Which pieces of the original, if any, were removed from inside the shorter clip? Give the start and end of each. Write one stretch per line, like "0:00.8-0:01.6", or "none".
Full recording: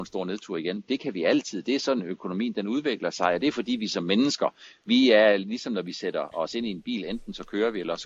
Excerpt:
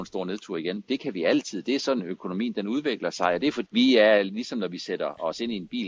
0:03.6-0:04.8

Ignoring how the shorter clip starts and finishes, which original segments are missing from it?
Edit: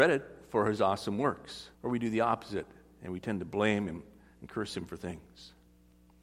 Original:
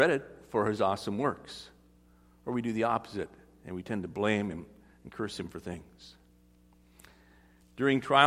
0:01.7-0:02.4

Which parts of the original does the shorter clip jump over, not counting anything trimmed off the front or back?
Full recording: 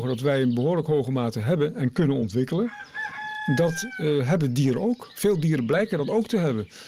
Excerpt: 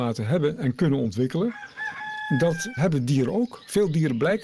0:03.9-0:04.3

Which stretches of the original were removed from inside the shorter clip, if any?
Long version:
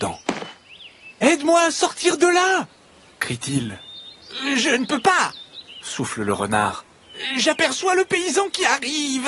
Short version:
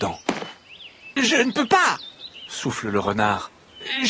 0:01.2-0:04.5

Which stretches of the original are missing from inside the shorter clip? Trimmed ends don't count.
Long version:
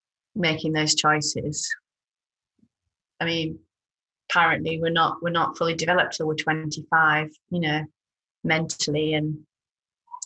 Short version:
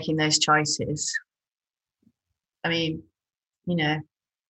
0:04.1-0:07.4

